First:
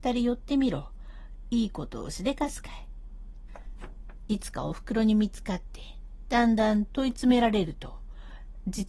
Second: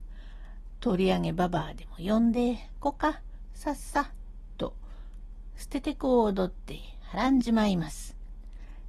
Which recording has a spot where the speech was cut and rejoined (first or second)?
first